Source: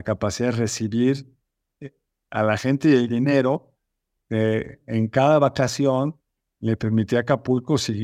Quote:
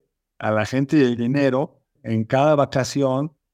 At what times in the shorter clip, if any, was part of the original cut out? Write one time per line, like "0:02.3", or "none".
0:02.0